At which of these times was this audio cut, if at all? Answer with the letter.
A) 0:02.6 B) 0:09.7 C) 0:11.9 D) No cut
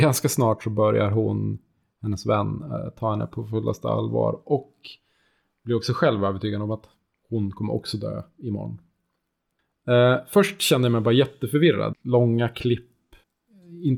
C